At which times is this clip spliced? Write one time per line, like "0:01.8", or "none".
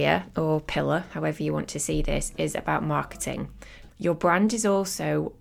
0:03.9